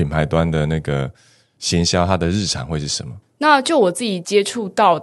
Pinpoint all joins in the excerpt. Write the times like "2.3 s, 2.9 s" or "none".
3.2 s